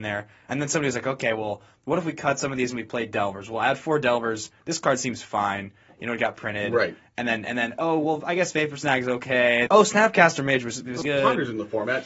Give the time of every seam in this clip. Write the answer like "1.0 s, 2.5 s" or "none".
9.7 s, 11.0 s